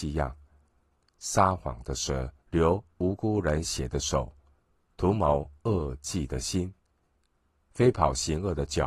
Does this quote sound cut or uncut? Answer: cut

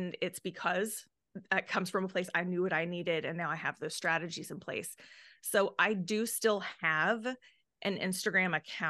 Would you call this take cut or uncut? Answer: uncut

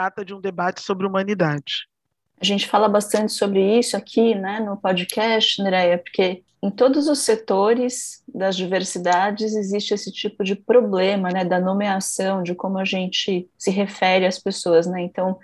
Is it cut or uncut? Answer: uncut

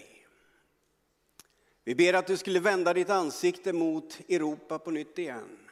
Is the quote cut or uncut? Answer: uncut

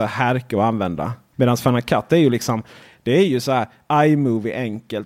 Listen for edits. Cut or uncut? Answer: cut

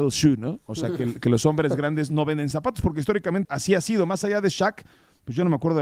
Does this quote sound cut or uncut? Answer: cut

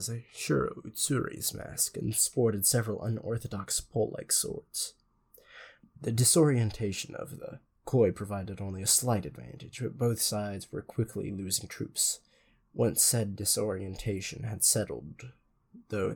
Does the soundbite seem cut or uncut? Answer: cut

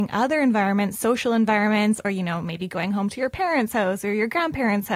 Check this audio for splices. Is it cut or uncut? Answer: uncut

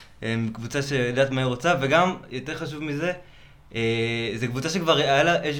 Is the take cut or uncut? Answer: uncut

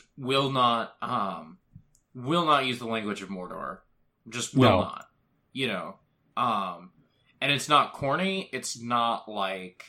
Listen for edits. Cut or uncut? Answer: uncut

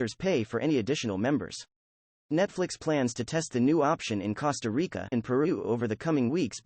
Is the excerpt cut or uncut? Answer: cut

